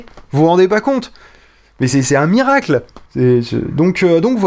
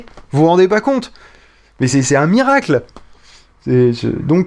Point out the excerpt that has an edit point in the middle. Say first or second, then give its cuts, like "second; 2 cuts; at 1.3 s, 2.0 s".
first; 1 cut; at 3.1 s